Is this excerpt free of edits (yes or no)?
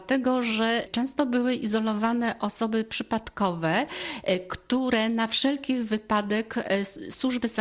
yes